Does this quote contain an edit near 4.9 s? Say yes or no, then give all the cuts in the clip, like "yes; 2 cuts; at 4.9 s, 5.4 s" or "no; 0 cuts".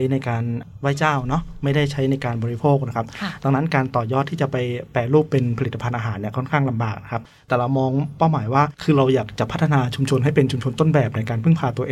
no; 1 cut; at 8.7 s